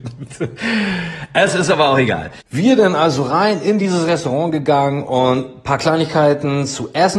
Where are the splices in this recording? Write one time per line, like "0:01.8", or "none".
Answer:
0:02.4